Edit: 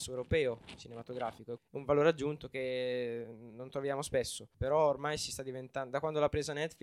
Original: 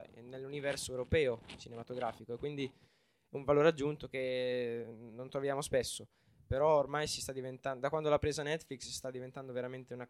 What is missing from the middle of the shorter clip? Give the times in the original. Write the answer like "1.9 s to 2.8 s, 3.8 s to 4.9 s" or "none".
2.4 s to 3.2 s, 6.1 s to 6.4 s